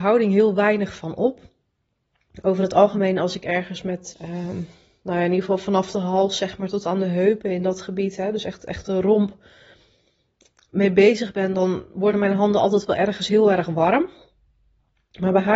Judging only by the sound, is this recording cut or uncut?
cut